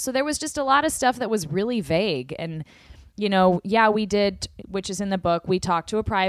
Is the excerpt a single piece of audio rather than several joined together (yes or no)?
no